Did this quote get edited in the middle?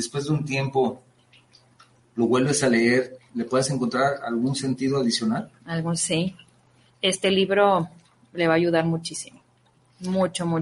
yes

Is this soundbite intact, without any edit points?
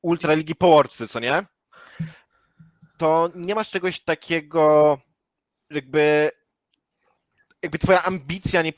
yes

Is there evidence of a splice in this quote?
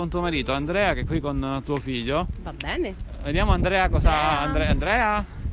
no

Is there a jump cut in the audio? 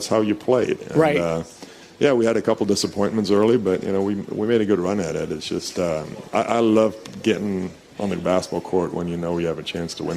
no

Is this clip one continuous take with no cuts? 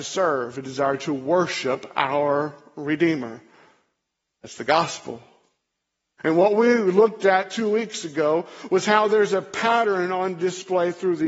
yes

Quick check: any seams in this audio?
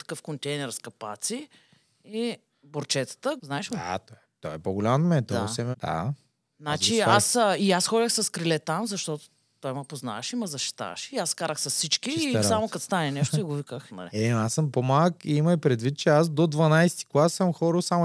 yes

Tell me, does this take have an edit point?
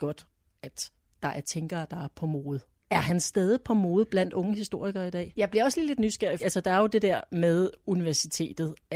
yes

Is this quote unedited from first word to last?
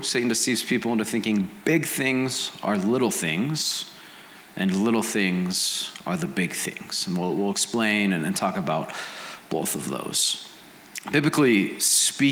yes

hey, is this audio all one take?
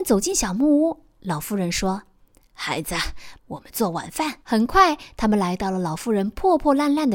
no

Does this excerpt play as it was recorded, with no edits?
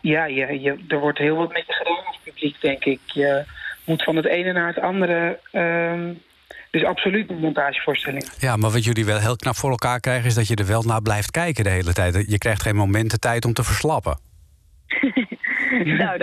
yes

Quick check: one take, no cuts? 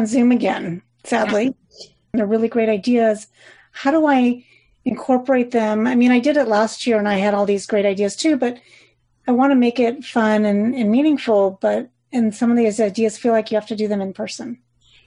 no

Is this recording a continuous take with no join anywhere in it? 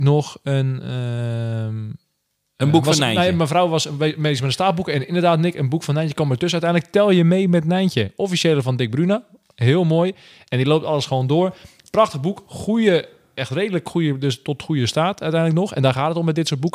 yes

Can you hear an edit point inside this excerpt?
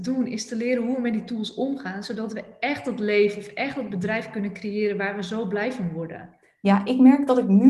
no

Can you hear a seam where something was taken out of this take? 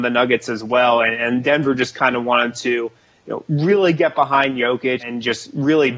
yes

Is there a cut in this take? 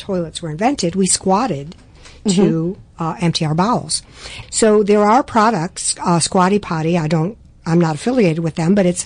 yes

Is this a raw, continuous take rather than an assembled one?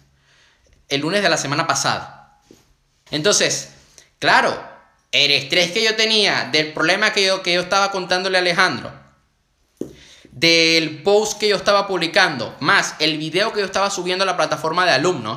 no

